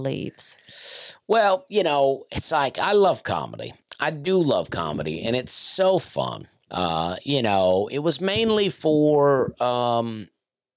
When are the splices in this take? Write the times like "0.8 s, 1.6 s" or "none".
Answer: 6.7 s